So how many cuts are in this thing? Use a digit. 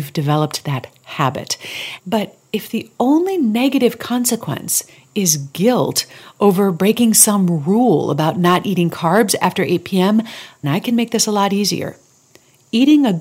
2